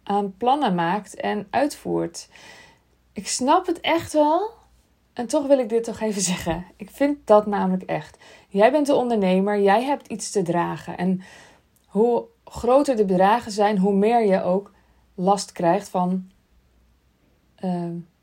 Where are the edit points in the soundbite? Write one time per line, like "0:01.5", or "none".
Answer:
none